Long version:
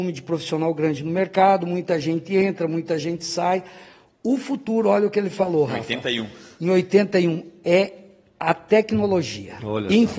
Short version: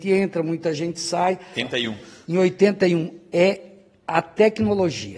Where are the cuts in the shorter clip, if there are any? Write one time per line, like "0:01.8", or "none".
0:01.5